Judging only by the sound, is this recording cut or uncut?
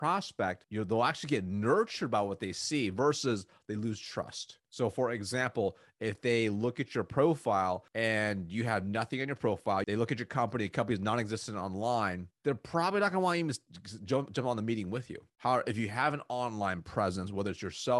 cut